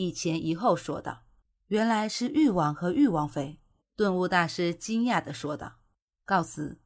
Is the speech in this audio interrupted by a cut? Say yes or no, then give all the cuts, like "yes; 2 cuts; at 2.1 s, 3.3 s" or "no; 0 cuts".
no; 0 cuts